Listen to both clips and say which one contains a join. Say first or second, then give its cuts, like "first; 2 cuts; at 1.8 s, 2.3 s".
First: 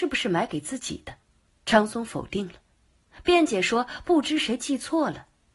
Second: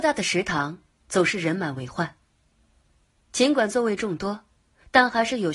first; 1 cut; at 1.2 s